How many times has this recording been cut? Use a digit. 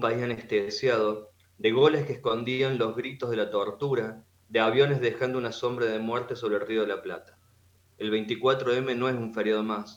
0